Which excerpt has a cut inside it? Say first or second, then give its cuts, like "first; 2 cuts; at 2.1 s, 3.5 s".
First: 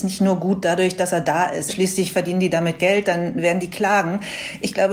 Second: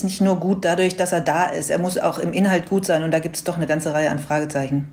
first; 1 cut; at 1.7 s